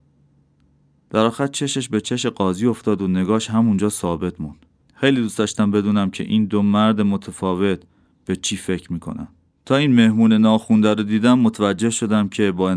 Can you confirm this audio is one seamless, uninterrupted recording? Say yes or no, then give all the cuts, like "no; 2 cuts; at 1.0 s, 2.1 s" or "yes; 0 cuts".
no; 2 cuts; at 4.8 s, 9.5 s